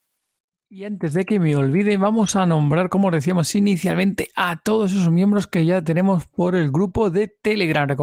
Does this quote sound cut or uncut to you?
uncut